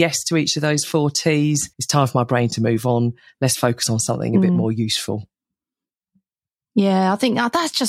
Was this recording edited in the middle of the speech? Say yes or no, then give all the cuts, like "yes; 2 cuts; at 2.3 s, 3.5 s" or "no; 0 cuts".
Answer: yes; 1 cut; at 1.7 s